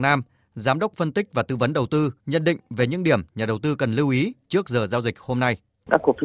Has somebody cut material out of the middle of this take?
yes; 1 cut; at 2.2 s

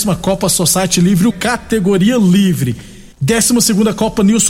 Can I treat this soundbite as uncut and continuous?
no; 2 cuts; at 1.3 s, 3.1 s

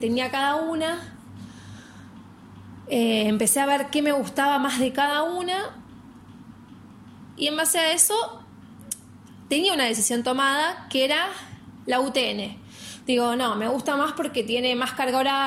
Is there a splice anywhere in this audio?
no; 0 cuts

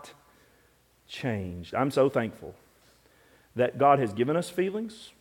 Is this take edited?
no; 0 cuts

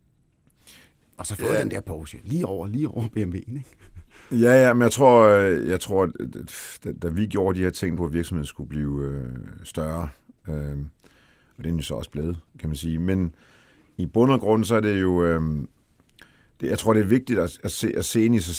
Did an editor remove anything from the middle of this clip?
yes; 1 cut; at 8.0 s

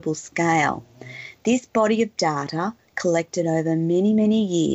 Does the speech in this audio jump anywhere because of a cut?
no; 0 cuts

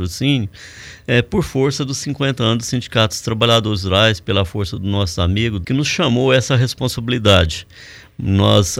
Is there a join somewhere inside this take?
yes; 1 cut; at 5.6 s

